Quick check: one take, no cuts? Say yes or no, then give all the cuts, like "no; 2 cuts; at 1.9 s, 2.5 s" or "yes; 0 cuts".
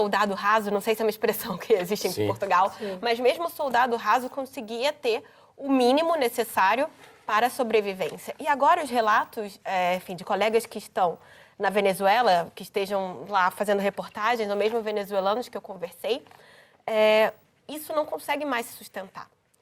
yes; 0 cuts